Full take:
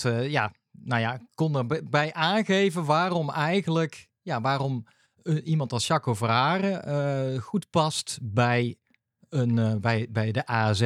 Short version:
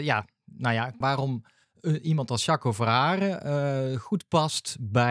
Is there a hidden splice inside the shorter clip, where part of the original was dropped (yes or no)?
yes